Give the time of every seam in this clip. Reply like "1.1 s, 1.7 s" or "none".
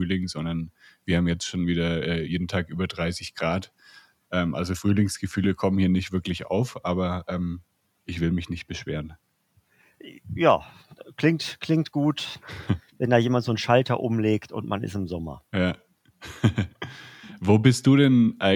none